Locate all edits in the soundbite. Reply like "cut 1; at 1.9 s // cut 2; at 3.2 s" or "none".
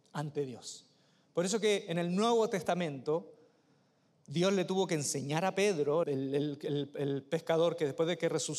cut 1; at 6.0 s

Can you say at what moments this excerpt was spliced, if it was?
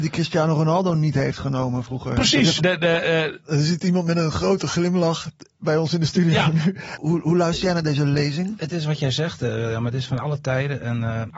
cut 1; at 2.6 s

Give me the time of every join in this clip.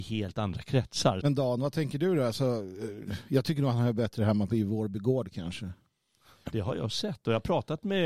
cut 1; at 1.2 s // cut 2; at 6.5 s

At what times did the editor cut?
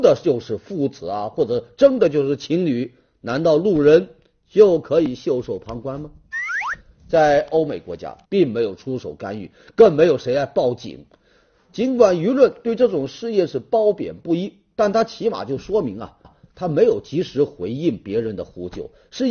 cut 1; at 8.2 s // cut 2; at 16.2 s

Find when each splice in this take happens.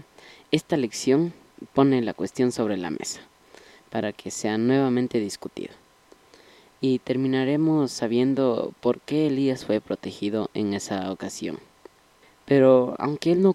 cut 1; at 12.2 s

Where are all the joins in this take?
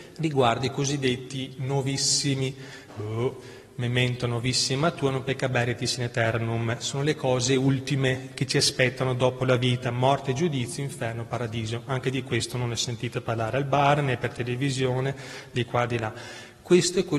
cut 1; at 2.9 s

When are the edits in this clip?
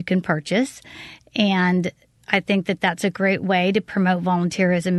none

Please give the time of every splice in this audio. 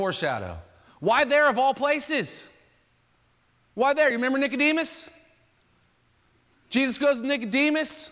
none

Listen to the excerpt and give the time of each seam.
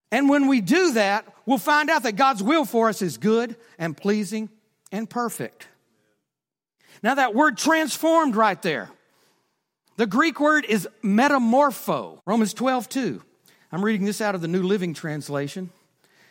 cut 1; at 12.2 s

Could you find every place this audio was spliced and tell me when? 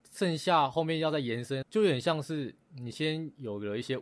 cut 1; at 1.6 s

